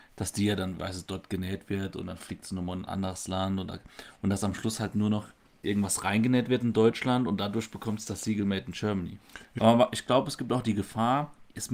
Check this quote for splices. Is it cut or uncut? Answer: cut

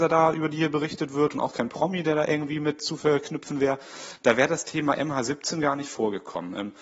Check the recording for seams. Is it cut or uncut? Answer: uncut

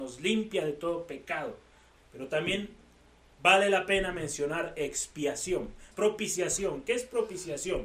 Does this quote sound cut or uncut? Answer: cut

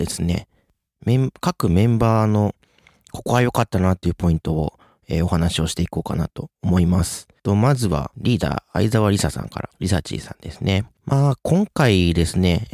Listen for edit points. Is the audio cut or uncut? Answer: uncut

